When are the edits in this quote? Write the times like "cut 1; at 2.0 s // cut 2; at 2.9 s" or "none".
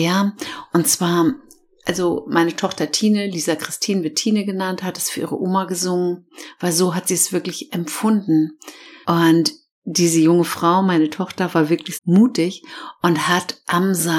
cut 1; at 9.0 s // cut 2; at 11.9 s

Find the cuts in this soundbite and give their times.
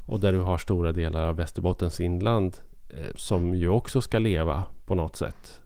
cut 1; at 3.1 s

